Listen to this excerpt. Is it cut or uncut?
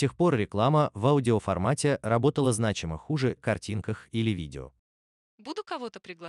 cut